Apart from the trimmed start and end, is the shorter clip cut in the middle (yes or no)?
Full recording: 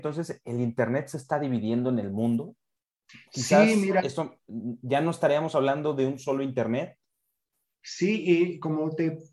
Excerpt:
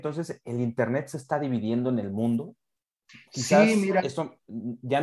no